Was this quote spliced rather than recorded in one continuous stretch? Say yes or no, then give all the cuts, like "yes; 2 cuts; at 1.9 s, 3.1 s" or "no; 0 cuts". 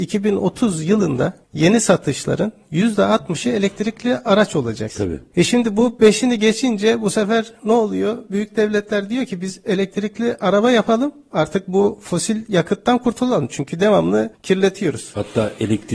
yes; 1 cut; at 4.9 s